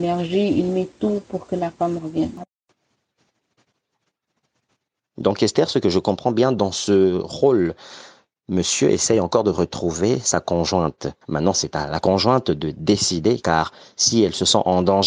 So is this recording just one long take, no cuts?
no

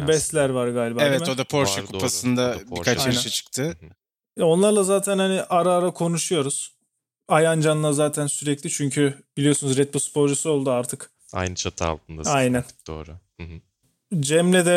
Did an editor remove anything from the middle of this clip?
no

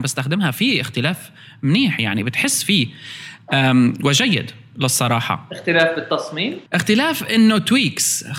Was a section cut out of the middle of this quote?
yes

